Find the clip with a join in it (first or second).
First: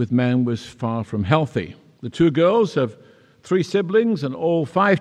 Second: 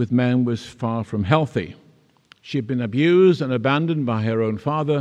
first